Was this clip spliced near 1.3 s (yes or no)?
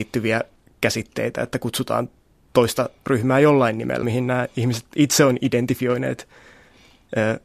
no